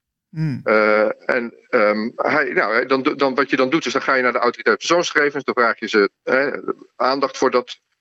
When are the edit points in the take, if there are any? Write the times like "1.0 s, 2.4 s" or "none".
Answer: 6.2 s